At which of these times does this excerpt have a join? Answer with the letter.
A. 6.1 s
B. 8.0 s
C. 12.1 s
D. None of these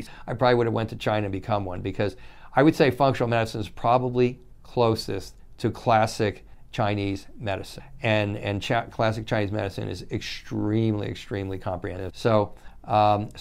C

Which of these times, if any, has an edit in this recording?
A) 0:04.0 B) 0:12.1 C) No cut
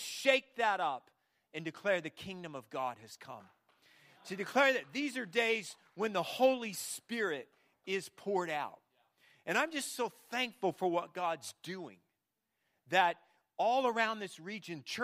C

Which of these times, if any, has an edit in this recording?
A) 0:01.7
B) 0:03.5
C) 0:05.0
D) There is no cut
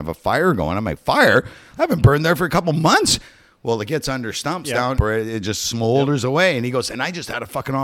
C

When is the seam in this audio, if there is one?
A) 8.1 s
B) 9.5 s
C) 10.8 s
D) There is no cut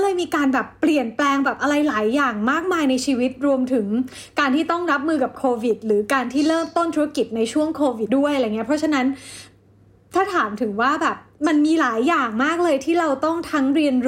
A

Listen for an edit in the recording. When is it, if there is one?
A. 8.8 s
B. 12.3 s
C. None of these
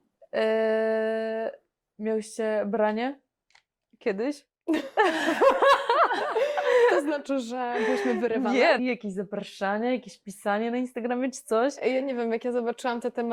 A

